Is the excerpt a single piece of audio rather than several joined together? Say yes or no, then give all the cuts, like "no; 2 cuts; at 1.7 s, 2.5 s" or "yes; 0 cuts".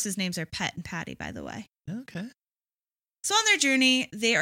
yes; 0 cuts